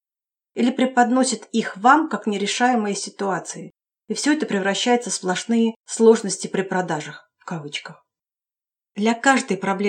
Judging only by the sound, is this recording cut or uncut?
uncut